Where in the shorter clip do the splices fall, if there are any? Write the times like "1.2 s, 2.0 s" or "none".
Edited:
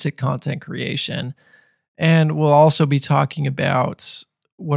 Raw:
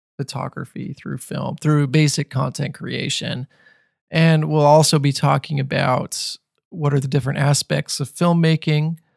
none